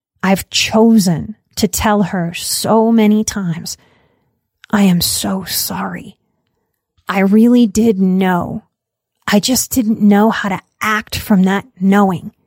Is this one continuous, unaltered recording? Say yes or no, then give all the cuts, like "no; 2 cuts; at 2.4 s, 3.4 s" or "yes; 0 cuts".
yes; 0 cuts